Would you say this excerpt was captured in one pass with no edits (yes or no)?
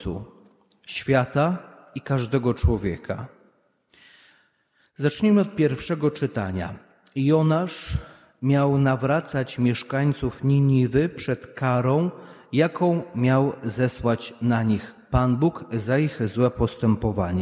yes